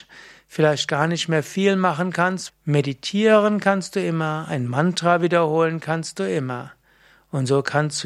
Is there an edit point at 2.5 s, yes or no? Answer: yes